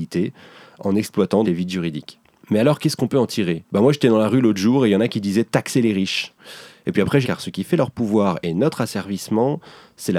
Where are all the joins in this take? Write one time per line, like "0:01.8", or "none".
0:01.4
0:07.2